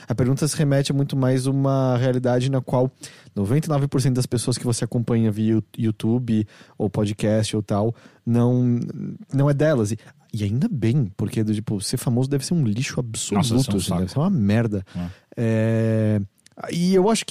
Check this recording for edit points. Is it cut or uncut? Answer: uncut